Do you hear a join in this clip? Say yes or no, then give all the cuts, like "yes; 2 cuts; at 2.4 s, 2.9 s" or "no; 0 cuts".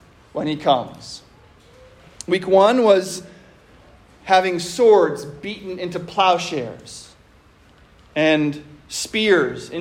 no; 0 cuts